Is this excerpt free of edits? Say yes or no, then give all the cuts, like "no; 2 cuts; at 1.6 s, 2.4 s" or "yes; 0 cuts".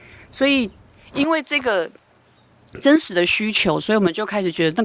yes; 0 cuts